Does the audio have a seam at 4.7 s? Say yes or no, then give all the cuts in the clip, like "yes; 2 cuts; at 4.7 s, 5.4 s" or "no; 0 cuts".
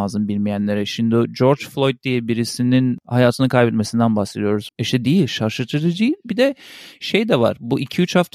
yes; 1 cut; at 4.7 s